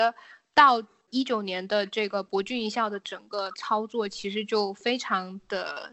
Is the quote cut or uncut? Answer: uncut